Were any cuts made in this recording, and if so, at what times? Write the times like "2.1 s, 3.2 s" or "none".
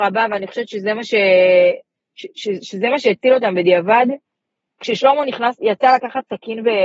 none